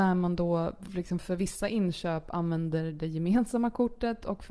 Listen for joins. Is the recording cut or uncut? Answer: uncut